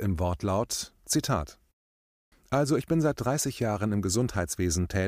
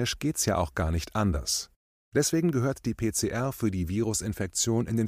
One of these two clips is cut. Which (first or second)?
first